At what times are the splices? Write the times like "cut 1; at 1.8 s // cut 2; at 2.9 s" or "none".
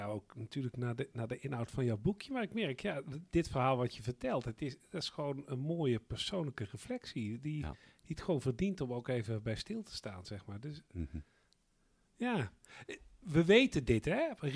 none